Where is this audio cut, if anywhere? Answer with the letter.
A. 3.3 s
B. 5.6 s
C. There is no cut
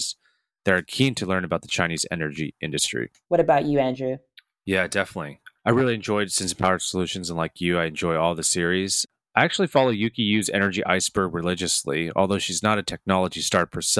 A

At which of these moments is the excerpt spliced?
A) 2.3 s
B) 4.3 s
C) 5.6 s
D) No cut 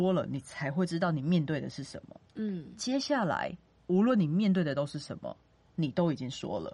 D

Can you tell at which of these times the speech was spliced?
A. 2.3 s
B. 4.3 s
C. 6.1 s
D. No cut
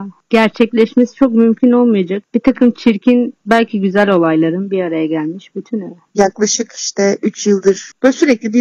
C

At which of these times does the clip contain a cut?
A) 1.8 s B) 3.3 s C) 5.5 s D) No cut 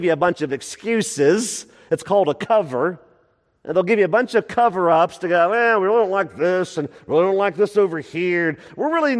D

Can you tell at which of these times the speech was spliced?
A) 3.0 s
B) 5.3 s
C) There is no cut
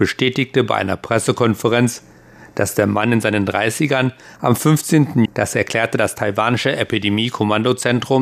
B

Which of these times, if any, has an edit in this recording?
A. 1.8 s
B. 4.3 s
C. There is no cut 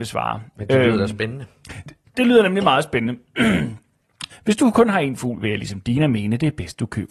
B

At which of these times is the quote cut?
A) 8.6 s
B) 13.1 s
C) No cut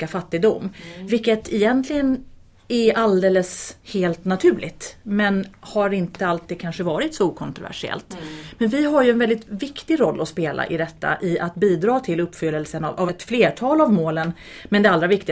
B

